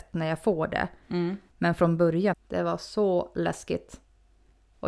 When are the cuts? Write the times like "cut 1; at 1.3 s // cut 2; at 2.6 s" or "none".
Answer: cut 1; at 2.3 s

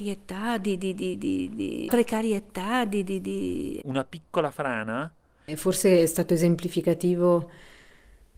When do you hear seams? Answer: cut 1; at 3.8 s // cut 2; at 5.4 s

